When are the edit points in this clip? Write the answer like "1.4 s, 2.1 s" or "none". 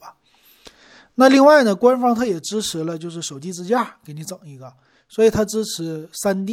none